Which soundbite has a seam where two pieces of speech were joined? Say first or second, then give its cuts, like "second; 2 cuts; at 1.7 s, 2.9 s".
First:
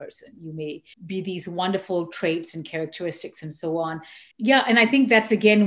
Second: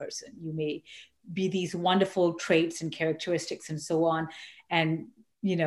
first; 2 cuts; at 0.9 s, 4.3 s